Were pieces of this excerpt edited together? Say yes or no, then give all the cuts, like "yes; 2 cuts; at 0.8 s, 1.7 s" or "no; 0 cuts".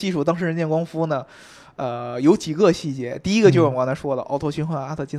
no; 0 cuts